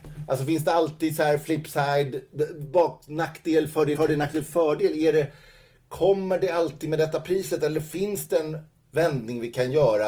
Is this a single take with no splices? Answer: no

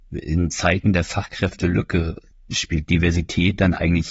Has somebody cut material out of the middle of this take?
yes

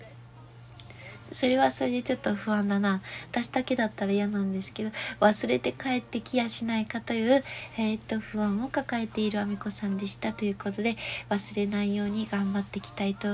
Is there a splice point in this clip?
no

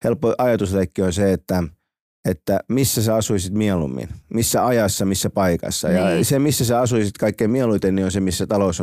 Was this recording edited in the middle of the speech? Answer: no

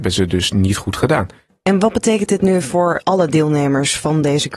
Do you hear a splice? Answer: no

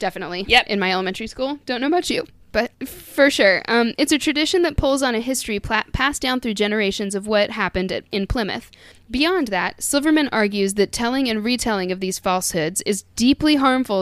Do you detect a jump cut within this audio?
yes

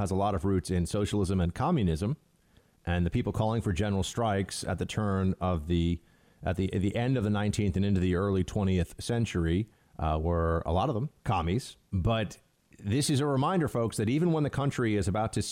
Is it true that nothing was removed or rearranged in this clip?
no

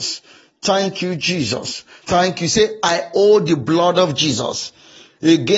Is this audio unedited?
no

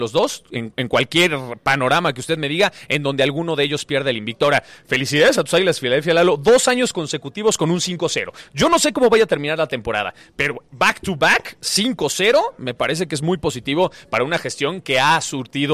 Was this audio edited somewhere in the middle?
no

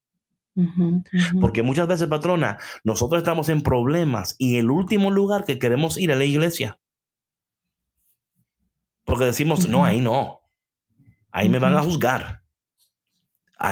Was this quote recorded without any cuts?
yes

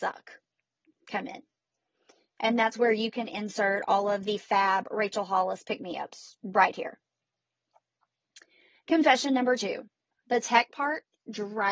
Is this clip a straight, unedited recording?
yes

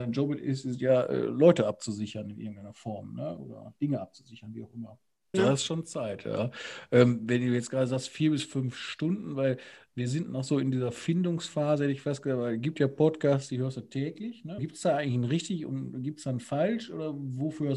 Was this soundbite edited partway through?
yes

